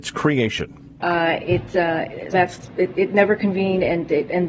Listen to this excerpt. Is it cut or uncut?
cut